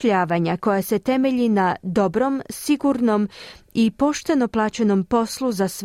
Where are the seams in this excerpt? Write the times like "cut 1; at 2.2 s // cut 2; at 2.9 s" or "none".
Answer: none